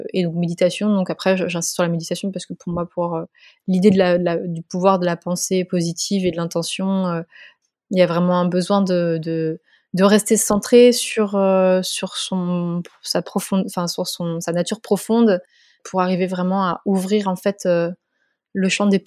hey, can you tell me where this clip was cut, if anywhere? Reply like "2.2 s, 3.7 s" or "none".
none